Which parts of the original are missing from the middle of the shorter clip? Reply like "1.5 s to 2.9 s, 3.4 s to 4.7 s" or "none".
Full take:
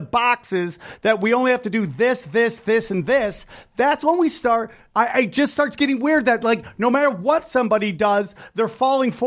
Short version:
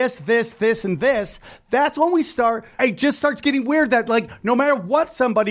4.9 s to 5.1 s

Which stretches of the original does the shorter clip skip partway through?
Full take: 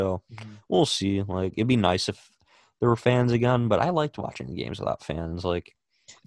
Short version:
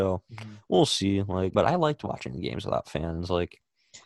1.5 s to 3.7 s

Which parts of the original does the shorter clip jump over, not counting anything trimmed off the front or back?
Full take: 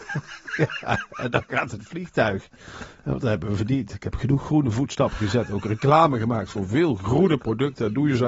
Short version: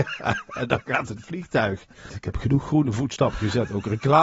2.7 s to 3.9 s

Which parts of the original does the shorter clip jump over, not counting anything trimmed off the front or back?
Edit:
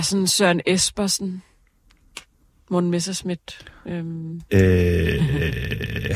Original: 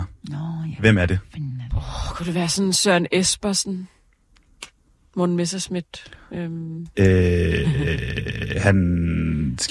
none

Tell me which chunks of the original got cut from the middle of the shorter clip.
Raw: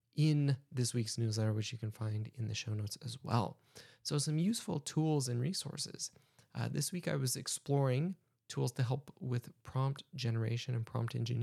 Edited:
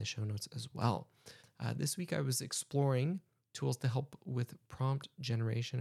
3.9 s to 6.3 s

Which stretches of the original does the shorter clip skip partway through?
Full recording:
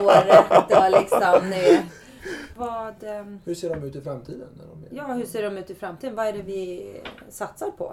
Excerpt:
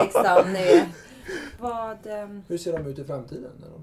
none

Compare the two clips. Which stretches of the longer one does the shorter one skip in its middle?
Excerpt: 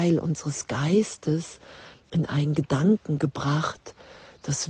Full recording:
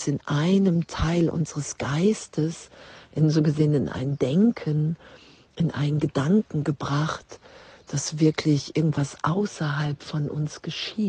3.0 s to 5.4 s

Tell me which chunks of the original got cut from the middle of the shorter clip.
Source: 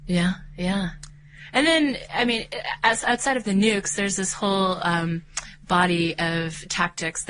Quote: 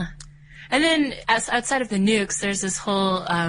2.1 s to 2.8 s

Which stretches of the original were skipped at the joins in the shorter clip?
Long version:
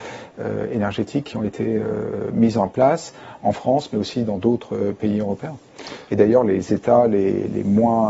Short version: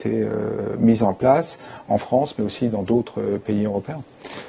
none

